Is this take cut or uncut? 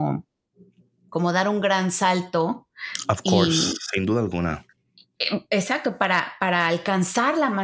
uncut